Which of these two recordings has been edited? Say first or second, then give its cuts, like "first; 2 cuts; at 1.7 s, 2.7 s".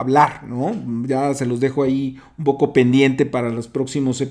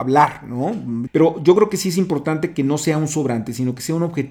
second; 1 cut; at 1.1 s